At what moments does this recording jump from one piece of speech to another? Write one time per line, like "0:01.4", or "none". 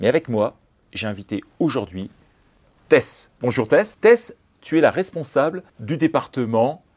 0:03.9
0:05.7